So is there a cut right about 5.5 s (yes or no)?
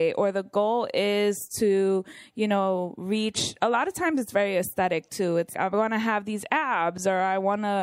yes